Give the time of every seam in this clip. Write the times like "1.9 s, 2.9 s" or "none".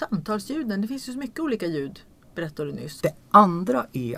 3.0 s